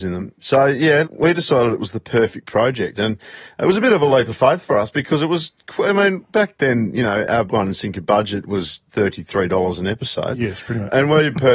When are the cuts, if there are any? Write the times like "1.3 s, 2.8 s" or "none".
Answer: 1.0 s, 7.5 s